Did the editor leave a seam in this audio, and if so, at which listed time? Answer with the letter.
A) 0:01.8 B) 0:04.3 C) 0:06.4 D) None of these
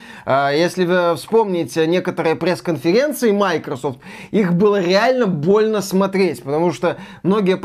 D